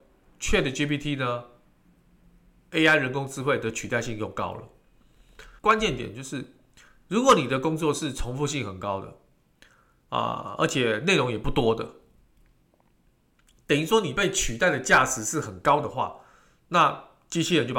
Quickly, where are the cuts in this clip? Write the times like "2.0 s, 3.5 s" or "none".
5.6 s

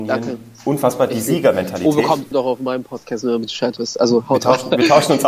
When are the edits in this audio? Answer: 2.3 s

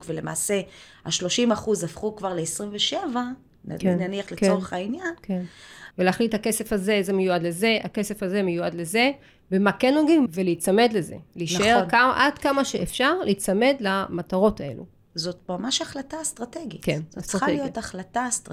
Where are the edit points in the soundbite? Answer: 5.9 s, 10.3 s

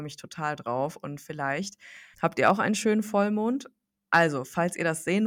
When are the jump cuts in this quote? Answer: 2.1 s, 4.1 s

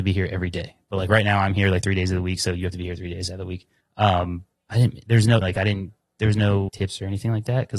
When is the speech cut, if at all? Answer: 5.4 s, 6.7 s

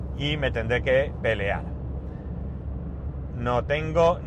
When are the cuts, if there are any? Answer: 3.3 s

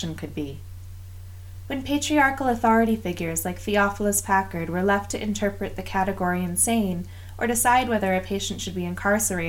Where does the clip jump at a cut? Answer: none

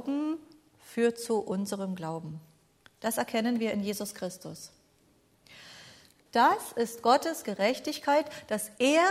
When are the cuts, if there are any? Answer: 2.8 s, 6.3 s

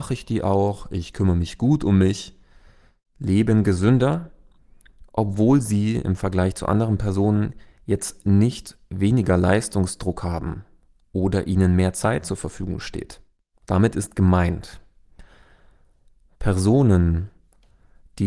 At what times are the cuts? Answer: 13.5 s

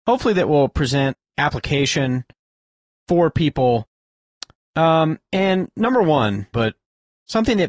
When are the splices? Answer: 6.5 s

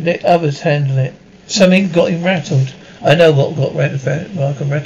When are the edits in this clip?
1.4 s

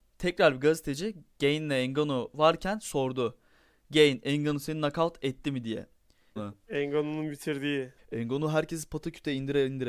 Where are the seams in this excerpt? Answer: 6.4 s, 8.0 s

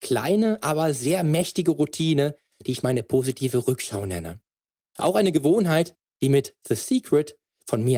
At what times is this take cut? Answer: none

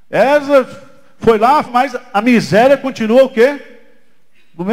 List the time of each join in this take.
1.6 s

